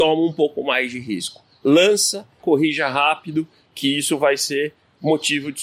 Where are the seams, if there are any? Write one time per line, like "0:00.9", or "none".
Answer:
0:02.4